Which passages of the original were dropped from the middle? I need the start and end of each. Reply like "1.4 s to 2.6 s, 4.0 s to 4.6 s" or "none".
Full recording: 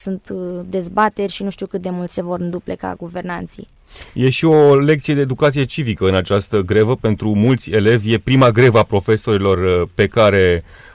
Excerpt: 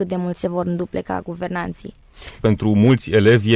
4.1 s to 7.0 s